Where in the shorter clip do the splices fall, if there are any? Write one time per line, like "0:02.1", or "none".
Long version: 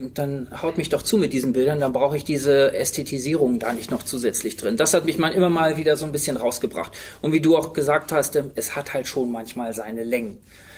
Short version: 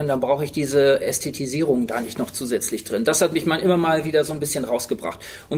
none